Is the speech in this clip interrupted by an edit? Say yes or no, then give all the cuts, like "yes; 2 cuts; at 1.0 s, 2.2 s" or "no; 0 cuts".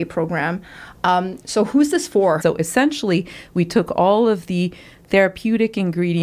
yes; 1 cut; at 2.4 s